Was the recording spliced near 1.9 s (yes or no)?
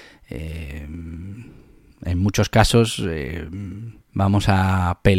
no